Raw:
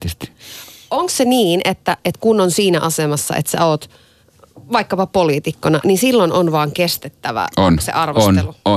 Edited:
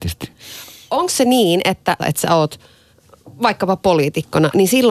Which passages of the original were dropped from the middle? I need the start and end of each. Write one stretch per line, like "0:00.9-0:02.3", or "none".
0:02.0-0:03.3